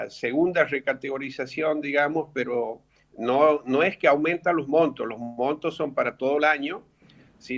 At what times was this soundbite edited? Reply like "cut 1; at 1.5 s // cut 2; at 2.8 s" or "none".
none